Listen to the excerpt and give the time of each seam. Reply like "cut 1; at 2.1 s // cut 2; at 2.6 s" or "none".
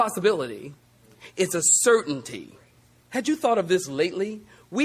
cut 1; at 3.0 s